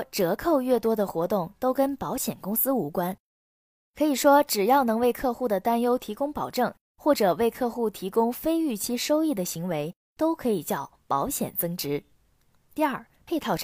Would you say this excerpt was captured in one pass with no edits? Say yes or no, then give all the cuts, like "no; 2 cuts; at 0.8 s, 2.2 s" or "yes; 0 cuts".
yes; 0 cuts